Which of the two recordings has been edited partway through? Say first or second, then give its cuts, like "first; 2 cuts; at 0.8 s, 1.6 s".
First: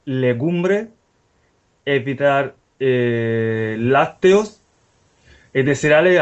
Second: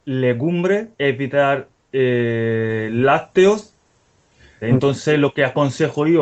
second; 2 cuts; at 0.9 s, 4.6 s